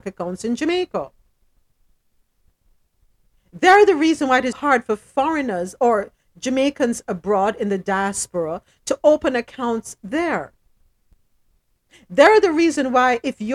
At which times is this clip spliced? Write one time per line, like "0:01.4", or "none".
0:04.5